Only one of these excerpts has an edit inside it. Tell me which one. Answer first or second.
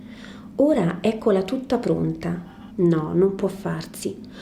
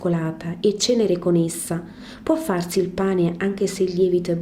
first